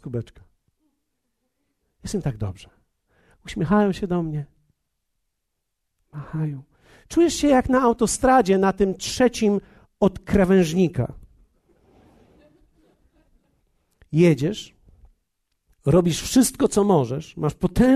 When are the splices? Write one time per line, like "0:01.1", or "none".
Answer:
0:01.8